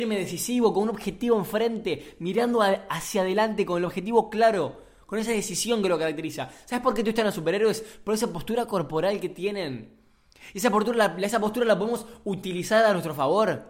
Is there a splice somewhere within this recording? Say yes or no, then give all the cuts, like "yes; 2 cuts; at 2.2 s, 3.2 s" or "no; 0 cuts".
no; 0 cuts